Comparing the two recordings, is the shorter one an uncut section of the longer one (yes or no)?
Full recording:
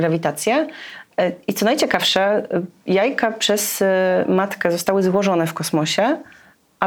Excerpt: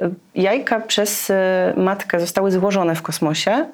yes